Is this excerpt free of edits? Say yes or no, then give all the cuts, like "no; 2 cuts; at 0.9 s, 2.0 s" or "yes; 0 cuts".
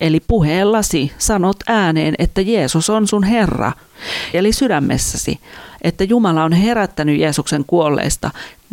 no; 1 cut; at 4.3 s